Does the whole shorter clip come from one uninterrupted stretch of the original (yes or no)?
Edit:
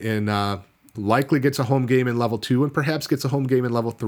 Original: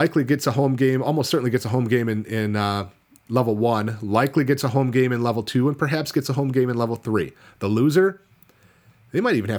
no